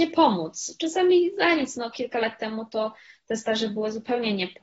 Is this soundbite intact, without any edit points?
yes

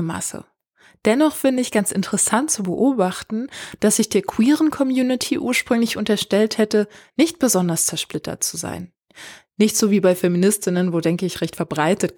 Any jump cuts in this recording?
no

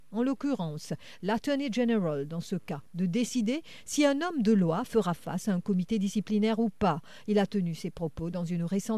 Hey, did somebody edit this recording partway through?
no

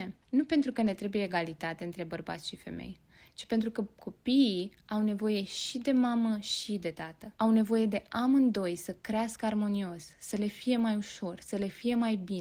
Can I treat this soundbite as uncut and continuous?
no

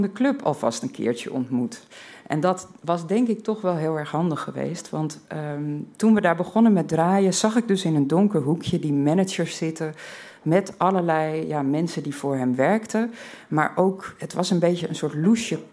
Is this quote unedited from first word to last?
yes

